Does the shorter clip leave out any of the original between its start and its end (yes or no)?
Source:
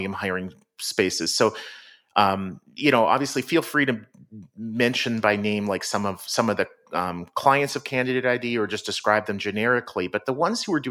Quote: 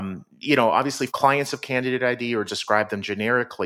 yes